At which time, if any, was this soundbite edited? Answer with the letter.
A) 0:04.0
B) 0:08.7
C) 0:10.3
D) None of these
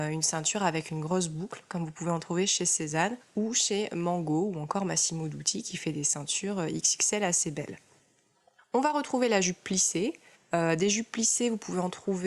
C